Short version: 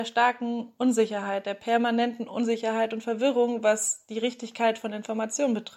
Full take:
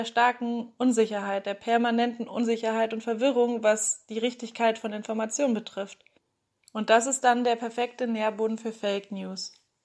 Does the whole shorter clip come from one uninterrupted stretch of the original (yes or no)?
yes